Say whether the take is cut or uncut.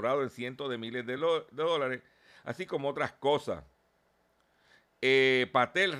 uncut